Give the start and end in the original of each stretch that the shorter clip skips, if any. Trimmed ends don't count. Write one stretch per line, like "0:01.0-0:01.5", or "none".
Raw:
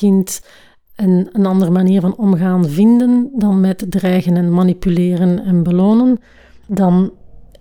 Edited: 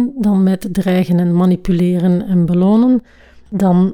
none